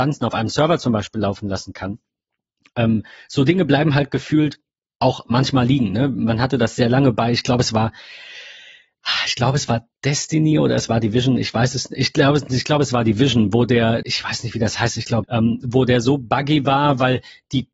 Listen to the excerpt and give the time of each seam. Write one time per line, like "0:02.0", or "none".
0:14.0
0:15.2